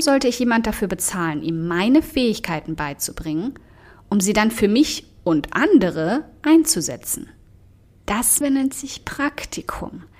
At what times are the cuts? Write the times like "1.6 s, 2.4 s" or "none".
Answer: 8.4 s

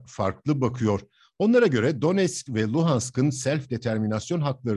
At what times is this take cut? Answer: none

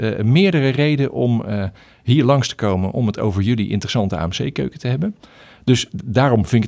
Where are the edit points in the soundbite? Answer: none

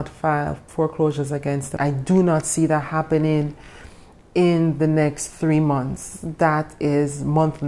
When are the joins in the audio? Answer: 1.8 s

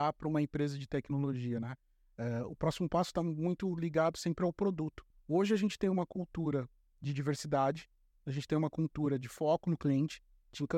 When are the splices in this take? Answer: 5.1 s

